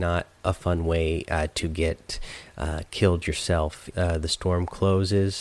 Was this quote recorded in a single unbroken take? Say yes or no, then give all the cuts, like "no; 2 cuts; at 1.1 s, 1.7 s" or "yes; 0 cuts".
no; 1 cut; at 3.9 s